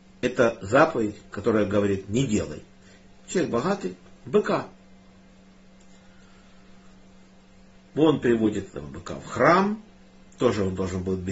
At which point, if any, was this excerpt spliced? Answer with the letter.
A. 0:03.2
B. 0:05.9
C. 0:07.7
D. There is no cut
A